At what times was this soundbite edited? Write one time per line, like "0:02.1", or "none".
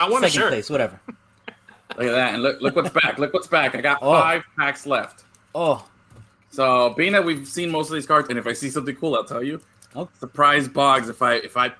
0:08.3
0:10.1